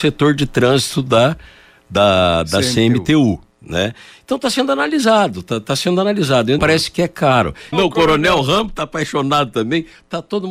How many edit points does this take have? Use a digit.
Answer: 2